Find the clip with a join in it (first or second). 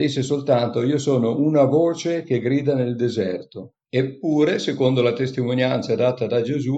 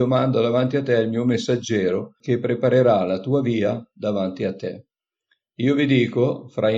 first